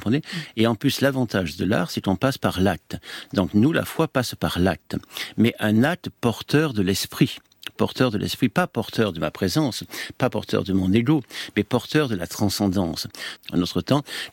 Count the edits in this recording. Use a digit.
1